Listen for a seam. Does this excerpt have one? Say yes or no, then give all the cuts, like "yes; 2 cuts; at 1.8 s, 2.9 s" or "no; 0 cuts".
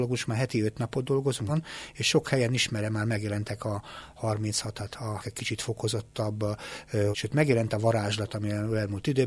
yes; 3 cuts; at 1.5 s, 5.2 s, 7.1 s